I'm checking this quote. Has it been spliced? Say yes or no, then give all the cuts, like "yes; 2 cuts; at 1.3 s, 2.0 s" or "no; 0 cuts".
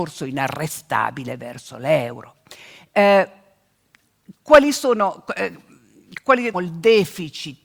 yes; 1 cut; at 6.5 s